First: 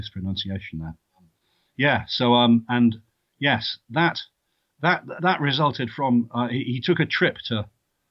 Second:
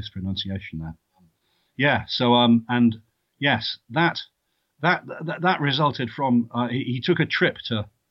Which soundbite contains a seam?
first; 1 cut; at 5.2 s

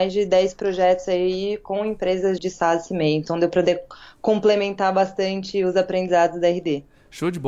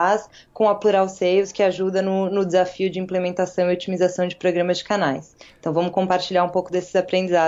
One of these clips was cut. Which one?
first; 1 cut; at 2.4 s

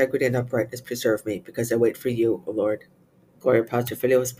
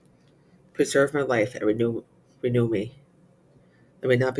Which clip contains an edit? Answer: first; 1 cut; at 3.2 s

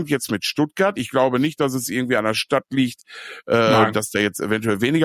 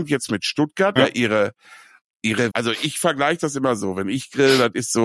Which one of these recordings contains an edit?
second; 2 cuts; at 1.0 s, 2.5 s

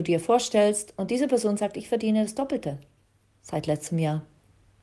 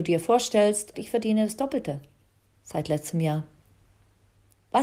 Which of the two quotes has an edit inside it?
second; 1 cut; at 0.9 s

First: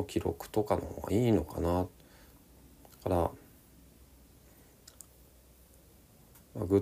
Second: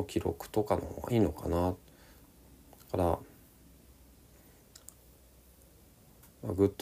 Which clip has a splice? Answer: second; 1 cut; at 1.1 s

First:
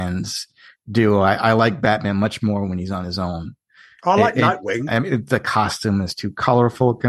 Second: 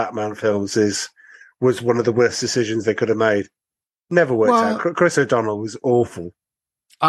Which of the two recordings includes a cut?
first; 1 cut; at 4.9 s

